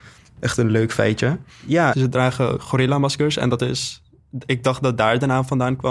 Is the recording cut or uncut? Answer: cut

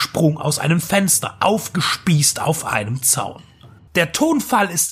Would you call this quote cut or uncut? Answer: cut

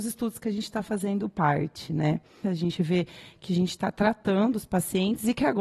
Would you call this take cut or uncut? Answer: cut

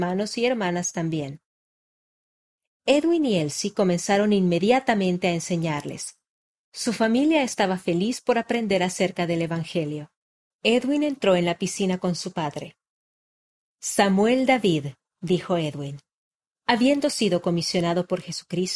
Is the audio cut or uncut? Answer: cut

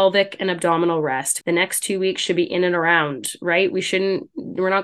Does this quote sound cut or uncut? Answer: cut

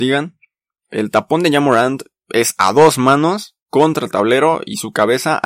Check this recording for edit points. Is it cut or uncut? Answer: cut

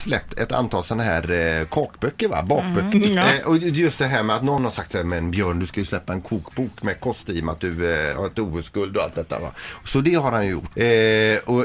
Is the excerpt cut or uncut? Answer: cut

